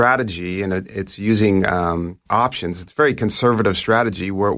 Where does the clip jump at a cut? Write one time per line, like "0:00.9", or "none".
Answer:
0:02.3